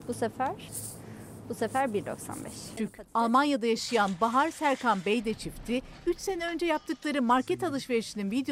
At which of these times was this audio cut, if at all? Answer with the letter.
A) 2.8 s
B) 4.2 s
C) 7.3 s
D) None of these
A